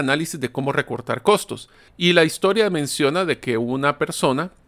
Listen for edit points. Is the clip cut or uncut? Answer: cut